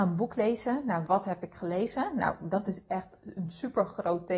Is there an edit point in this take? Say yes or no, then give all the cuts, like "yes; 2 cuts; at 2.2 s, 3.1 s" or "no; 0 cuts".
yes; 1 cut; at 1.1 s